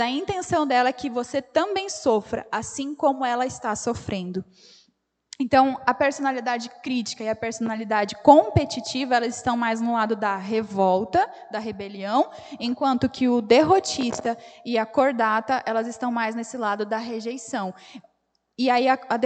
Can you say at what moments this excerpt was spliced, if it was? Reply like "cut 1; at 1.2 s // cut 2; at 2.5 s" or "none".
none

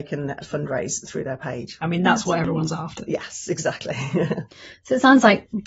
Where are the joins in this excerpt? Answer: cut 1; at 1.8 s

